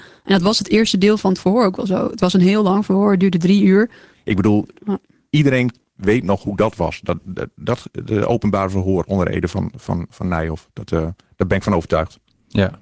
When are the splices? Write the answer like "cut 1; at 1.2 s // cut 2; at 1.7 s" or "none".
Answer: cut 1; at 4.1 s